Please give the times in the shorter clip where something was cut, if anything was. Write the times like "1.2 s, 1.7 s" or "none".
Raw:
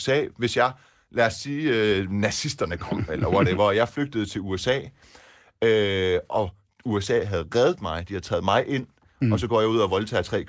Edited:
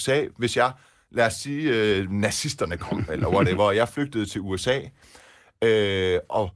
none